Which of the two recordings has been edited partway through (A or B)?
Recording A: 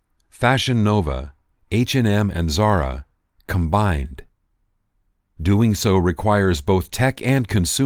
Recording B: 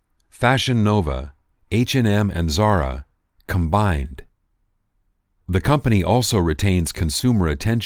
A